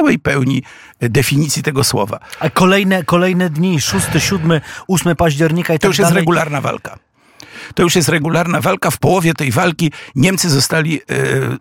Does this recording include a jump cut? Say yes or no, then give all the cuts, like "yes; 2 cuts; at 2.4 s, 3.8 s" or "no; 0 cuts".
no; 0 cuts